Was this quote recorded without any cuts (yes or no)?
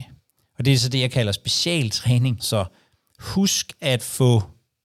no